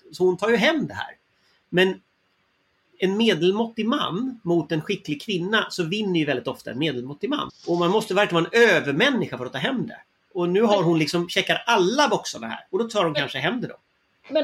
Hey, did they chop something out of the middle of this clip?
yes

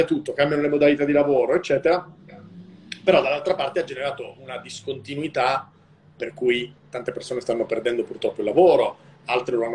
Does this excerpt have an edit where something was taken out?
no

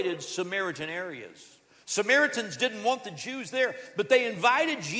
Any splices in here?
no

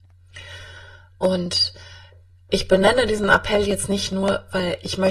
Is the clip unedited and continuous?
yes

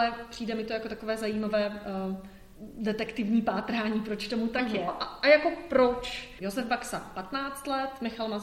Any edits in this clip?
yes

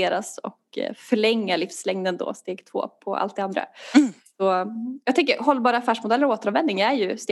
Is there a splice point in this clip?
no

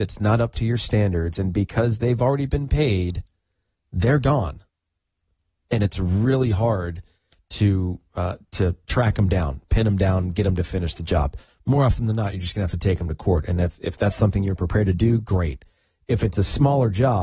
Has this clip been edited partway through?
no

